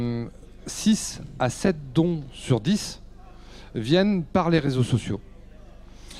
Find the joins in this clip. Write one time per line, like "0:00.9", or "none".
none